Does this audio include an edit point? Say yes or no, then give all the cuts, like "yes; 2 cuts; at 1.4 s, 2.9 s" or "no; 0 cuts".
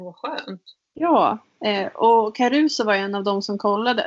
no; 0 cuts